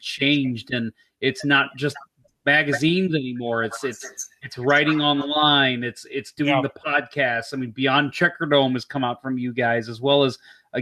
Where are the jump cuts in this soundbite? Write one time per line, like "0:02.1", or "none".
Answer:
none